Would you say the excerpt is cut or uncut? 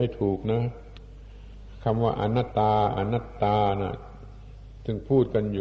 cut